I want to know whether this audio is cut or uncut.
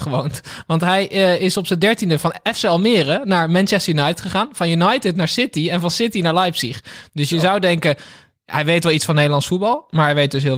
uncut